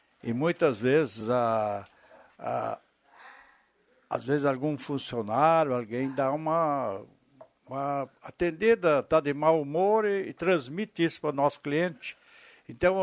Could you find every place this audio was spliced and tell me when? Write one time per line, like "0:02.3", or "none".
none